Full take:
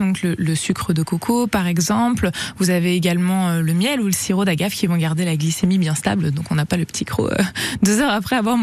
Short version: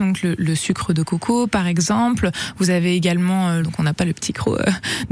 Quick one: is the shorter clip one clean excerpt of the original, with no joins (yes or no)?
no